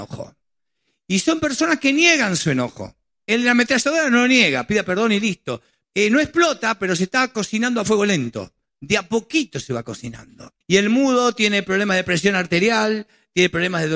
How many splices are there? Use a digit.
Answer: 2